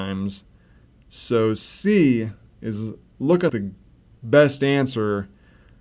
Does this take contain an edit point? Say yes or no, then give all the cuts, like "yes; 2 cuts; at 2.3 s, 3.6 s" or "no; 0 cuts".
yes; 1 cut; at 3.5 s